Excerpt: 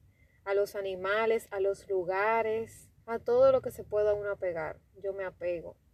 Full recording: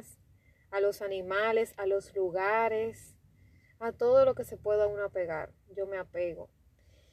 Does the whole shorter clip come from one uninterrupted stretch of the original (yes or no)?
no